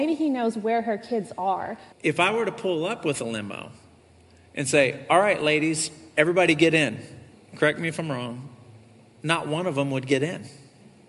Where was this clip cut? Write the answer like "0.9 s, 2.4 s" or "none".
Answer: 1.9 s, 7.3 s

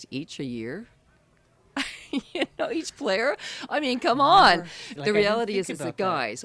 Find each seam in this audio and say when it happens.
5.0 s

